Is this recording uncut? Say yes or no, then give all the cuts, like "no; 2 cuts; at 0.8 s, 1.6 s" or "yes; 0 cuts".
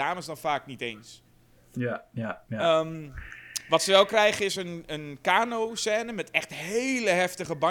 yes; 0 cuts